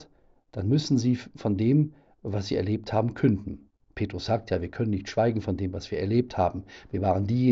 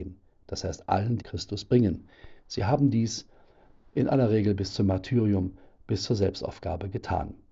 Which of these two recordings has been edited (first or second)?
second